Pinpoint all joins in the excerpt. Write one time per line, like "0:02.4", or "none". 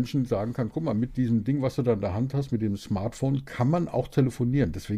none